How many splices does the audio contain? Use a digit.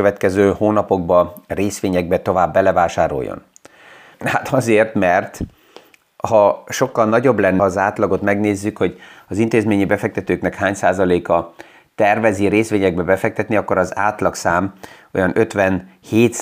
2